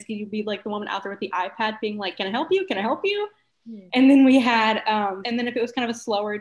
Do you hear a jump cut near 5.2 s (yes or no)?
yes